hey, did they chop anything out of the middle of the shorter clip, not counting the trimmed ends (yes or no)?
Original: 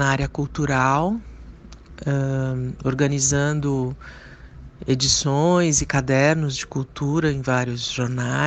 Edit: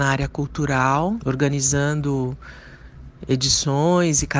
yes